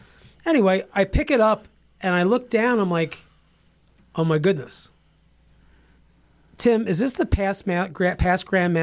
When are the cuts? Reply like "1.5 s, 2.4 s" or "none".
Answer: none